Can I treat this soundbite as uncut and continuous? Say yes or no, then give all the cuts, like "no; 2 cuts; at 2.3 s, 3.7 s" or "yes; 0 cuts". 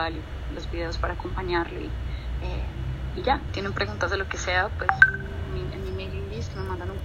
no; 1 cut; at 3.5 s